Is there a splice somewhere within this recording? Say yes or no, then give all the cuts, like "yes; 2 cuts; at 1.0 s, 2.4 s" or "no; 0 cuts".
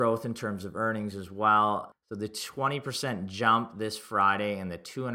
yes; 1 cut; at 1.9 s